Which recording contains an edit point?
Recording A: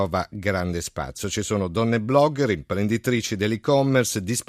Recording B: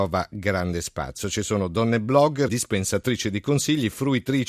B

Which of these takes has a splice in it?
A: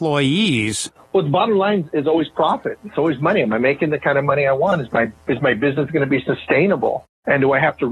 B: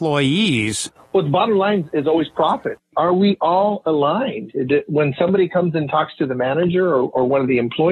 B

